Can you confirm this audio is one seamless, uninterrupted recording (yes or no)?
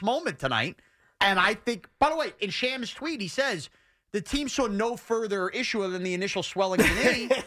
yes